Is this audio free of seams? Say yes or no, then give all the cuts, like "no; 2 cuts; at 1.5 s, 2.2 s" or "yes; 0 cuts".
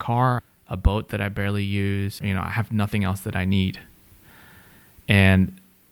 no; 1 cut; at 2.2 s